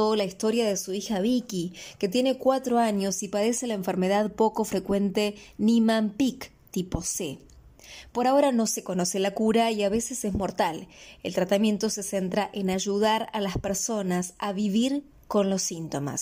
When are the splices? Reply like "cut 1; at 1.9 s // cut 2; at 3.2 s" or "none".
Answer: none